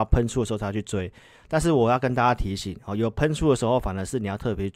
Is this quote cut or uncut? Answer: uncut